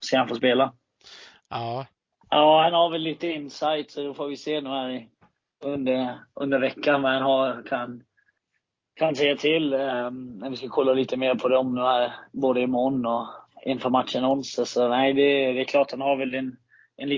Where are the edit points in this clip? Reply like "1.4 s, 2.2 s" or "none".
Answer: 2.2 s